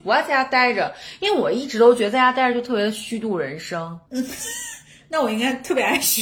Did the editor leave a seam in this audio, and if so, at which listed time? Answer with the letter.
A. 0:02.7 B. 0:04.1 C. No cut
B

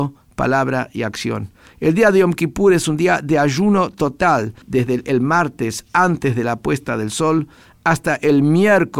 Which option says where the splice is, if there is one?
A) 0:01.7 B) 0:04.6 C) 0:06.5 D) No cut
B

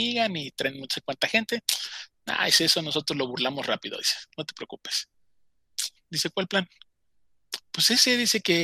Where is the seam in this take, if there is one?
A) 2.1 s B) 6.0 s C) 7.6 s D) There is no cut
B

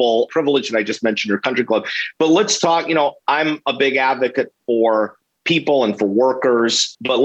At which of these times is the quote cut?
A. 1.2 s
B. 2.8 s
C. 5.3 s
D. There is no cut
D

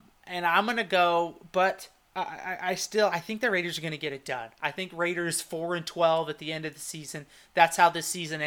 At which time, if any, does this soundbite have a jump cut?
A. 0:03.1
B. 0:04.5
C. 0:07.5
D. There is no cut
A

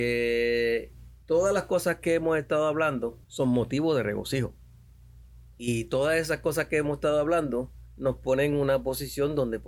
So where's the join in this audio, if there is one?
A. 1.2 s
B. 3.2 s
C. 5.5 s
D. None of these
B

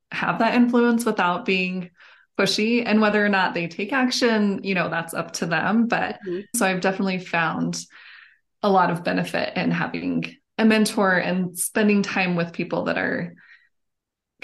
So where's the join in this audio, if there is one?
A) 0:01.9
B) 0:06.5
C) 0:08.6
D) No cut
B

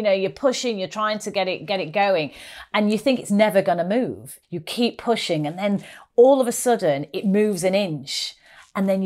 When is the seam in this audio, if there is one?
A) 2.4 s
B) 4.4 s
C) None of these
B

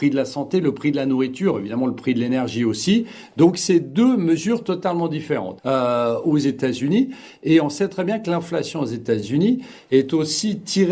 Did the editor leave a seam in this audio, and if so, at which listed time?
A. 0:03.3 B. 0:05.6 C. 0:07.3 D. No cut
B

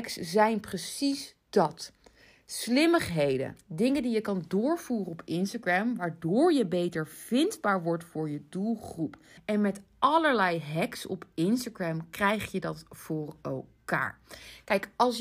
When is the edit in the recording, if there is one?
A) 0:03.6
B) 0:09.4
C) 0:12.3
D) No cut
B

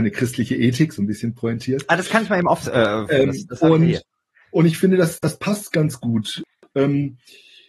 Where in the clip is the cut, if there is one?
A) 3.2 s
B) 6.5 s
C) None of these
A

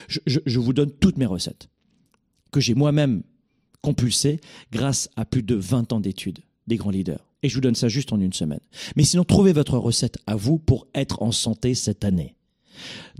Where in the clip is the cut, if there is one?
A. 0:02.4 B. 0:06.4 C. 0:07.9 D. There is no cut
D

